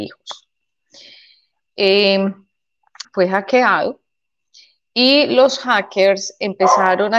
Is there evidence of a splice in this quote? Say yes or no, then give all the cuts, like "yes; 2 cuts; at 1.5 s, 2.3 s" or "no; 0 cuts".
yes; 1 cut; at 3.0 s